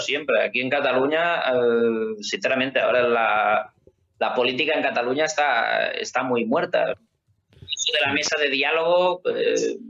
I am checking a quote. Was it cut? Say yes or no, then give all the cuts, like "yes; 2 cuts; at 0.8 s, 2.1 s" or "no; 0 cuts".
yes; 1 cut; at 6.9 s